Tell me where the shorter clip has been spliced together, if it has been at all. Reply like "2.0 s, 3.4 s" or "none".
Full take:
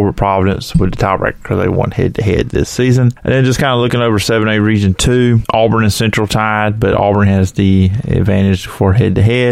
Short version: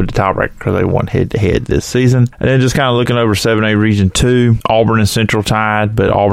none